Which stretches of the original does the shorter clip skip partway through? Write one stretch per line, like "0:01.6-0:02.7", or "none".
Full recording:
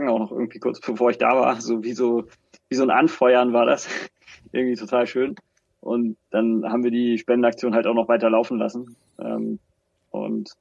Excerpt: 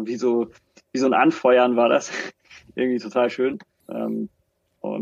0:05.6-0:09.1